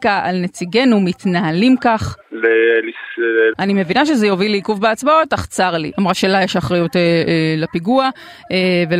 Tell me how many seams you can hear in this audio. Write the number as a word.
three